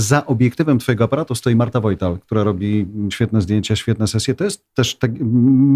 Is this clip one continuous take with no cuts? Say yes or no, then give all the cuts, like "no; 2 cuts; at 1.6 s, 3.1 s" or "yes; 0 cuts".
no; 1 cut; at 3.1 s